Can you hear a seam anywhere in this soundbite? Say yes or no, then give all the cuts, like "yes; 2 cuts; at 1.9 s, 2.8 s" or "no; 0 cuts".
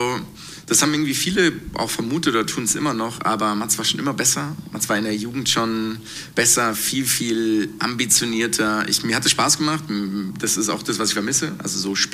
no; 0 cuts